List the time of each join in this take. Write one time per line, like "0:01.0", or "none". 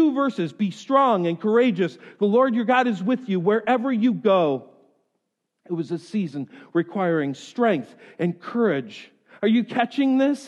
none